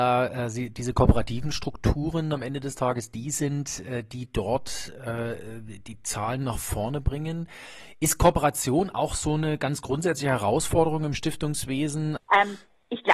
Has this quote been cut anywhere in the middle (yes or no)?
yes